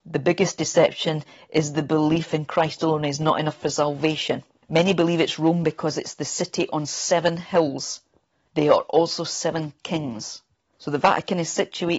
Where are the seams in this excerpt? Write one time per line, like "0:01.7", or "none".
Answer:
0:08.5